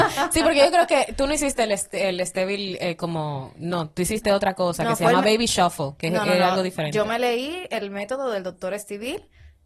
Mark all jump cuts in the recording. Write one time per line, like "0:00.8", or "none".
none